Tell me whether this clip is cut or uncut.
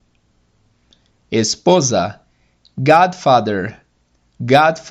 uncut